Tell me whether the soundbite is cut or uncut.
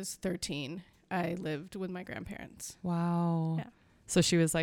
uncut